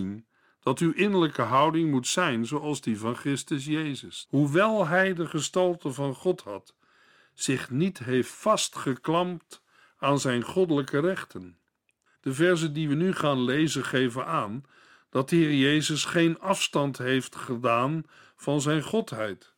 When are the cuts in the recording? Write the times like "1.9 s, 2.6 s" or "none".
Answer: 4.2 s, 12.2 s